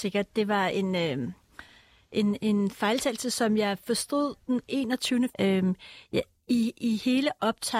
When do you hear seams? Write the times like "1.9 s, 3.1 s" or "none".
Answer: 5.3 s